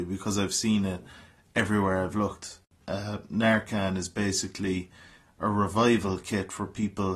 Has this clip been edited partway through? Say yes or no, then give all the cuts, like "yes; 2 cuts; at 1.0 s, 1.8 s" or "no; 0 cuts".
yes; 1 cut; at 2.8 s